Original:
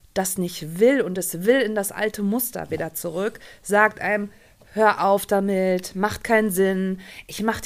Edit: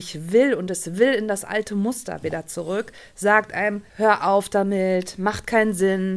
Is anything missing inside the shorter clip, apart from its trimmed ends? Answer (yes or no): yes